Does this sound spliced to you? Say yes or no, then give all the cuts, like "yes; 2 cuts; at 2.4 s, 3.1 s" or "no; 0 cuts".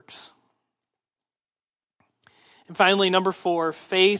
no; 0 cuts